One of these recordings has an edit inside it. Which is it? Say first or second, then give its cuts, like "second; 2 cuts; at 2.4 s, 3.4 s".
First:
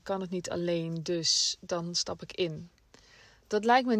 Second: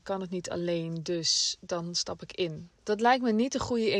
second; 1 cut; at 2.8 s